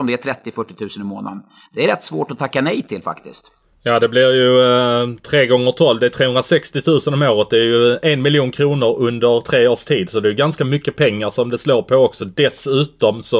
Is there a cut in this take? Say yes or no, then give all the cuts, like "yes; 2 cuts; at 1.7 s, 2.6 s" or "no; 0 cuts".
no; 0 cuts